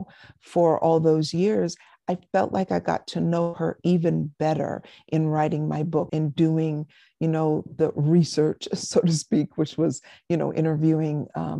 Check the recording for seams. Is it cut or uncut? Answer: cut